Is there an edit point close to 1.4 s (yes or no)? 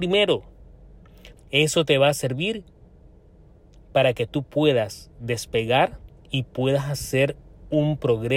yes